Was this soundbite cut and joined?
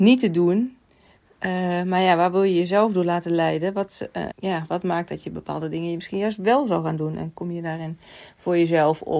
yes; 1 cut; at 4.3 s

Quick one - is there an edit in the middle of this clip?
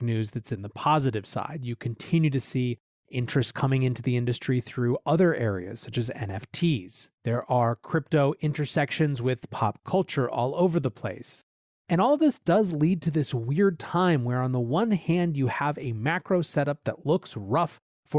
yes; 1 cut; at 7.1 s

